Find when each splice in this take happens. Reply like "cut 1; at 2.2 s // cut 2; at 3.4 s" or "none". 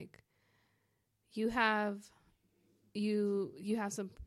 none